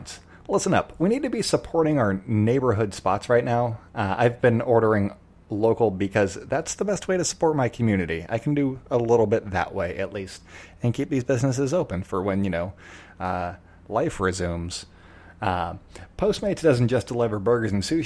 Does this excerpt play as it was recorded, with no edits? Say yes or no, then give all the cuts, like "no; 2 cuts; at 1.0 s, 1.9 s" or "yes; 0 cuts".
yes; 0 cuts